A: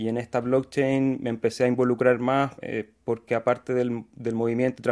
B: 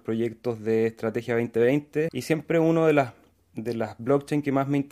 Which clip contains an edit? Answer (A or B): B